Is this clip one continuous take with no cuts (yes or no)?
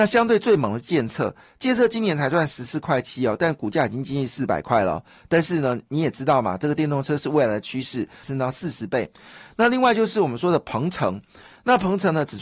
no